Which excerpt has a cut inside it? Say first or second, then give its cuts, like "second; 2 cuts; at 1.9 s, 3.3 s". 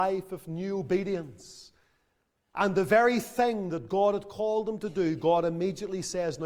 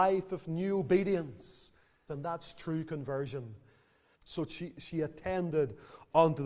second; 2 cuts; at 2.1 s, 4.1 s